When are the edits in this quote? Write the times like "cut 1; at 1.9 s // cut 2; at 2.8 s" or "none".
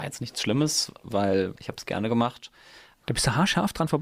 cut 1; at 3.0 s